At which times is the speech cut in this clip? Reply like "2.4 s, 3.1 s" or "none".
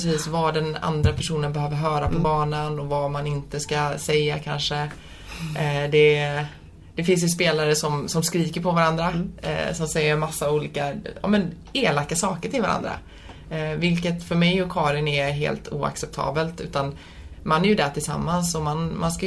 none